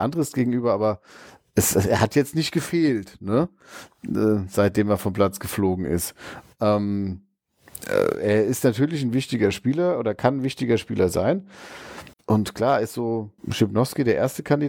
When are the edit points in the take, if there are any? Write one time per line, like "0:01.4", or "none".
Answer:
0:12.1
0:13.4